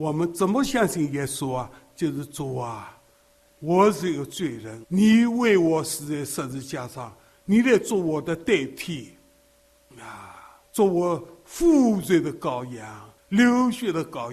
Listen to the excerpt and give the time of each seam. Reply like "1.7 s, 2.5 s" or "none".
4.8 s, 10.6 s, 13.2 s